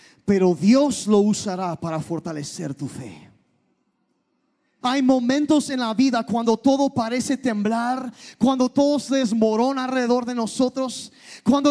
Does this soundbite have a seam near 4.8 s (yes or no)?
yes